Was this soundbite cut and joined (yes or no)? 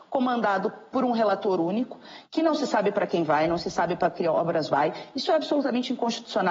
no